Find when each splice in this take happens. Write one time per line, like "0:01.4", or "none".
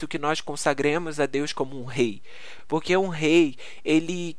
none